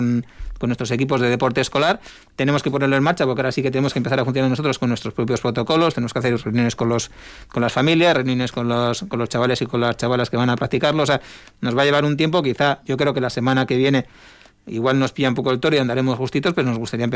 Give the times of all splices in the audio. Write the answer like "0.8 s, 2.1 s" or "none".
none